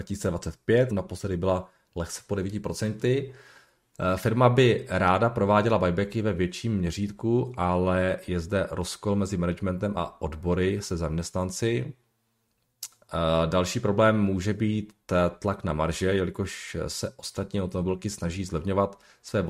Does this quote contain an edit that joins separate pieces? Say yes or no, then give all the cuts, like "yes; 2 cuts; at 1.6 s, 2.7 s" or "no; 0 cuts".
yes; 1 cut; at 0.9 s